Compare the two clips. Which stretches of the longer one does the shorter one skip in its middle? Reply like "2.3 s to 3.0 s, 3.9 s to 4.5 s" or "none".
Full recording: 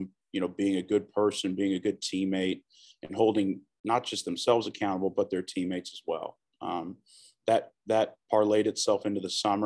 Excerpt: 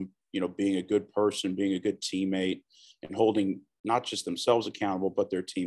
none